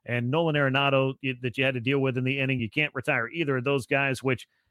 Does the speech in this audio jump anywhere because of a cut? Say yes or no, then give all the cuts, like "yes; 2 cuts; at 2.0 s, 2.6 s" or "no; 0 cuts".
no; 0 cuts